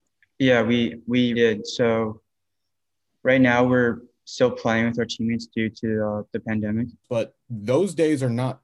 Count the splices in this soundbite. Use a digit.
2